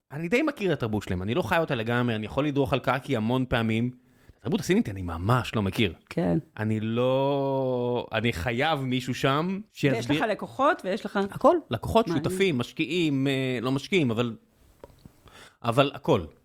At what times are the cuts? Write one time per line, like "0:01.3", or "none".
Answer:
0:09.7